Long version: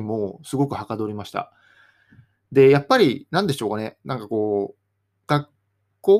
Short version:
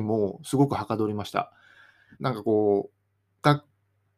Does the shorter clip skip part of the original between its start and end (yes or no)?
yes